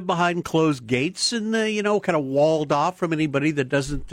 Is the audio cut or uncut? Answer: uncut